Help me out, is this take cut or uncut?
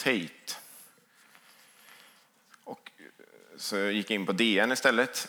cut